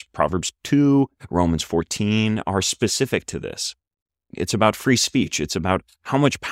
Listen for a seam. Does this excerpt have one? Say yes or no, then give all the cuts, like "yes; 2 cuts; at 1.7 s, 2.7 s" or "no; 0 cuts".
yes; 1 cut; at 4.3 s